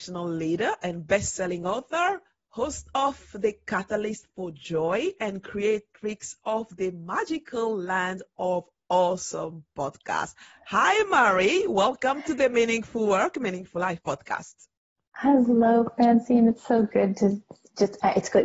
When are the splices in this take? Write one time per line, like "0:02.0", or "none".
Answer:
none